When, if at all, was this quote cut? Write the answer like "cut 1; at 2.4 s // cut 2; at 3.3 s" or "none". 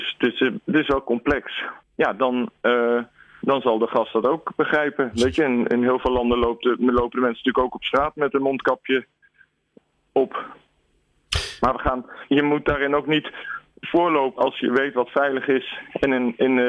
cut 1; at 1.8 s // cut 2; at 12.3 s // cut 3; at 14.4 s